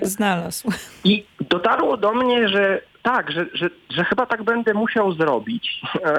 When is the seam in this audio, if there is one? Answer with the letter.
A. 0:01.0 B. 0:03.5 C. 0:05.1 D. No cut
B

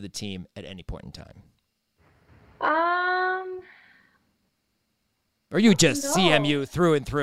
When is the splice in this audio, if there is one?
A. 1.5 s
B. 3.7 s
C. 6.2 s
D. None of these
D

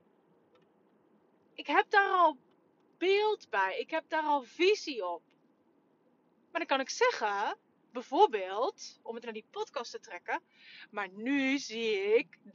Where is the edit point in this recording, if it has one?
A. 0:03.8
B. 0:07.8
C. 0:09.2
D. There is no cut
C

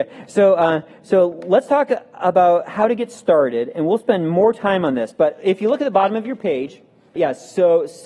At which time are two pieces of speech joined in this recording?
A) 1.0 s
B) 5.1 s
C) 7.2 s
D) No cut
C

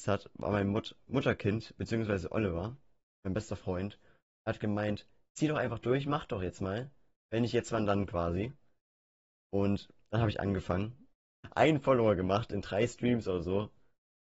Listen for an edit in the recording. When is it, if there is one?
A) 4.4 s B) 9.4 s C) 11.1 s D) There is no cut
C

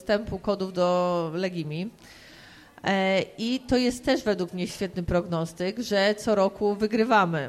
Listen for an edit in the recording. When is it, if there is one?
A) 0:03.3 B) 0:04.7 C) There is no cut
B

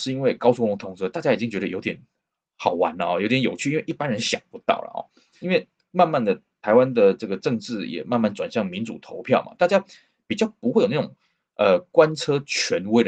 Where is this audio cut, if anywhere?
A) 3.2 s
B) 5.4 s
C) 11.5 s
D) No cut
B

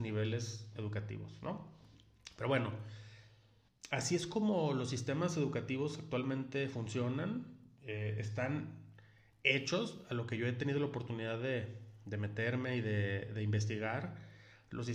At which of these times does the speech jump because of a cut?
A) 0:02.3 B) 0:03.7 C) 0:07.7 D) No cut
B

